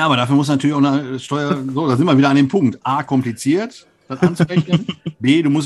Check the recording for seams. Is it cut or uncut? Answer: uncut